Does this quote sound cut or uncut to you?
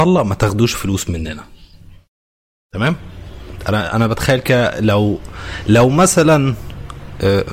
uncut